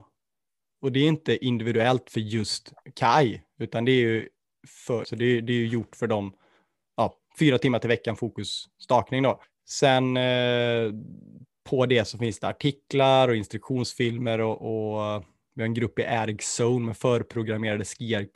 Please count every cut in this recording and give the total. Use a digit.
1